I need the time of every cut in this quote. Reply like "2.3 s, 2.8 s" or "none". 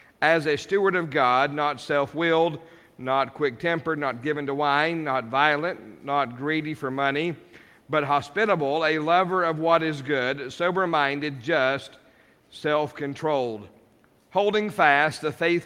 none